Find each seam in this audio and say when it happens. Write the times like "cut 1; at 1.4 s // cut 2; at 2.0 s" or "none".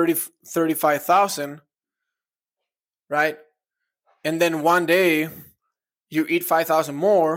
none